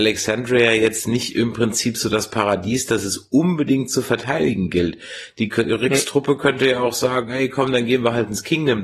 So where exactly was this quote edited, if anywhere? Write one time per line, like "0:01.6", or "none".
none